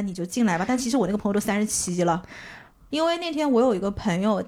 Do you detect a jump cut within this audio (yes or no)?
yes